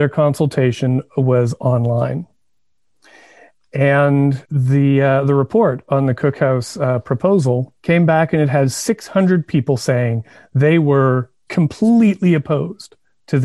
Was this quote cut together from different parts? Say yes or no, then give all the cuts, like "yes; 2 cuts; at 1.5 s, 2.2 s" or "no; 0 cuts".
no; 0 cuts